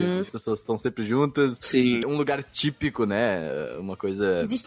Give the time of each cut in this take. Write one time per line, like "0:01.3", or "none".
0:02.0